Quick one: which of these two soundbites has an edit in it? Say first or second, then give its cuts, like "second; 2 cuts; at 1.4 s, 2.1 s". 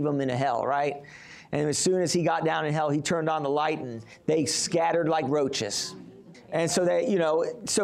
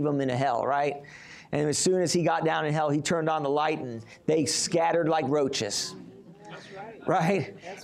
first; 1 cut; at 6.3 s